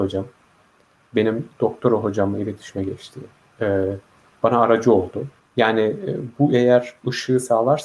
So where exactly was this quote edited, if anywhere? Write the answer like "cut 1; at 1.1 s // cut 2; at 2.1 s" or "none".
cut 1; at 5.4 s